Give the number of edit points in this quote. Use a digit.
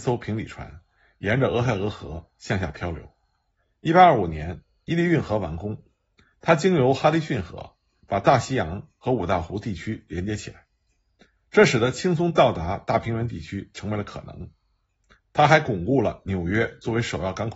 0